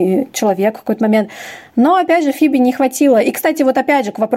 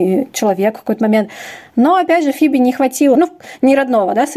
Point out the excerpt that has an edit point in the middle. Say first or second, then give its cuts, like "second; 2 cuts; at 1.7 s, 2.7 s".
second; 1 cut; at 3.1 s